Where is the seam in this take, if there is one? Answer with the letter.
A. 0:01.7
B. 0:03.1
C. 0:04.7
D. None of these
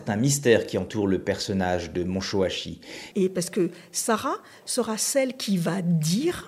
B